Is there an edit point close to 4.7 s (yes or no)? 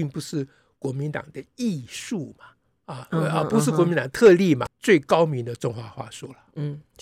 yes